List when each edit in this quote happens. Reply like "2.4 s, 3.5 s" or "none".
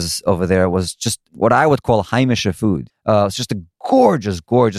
2.9 s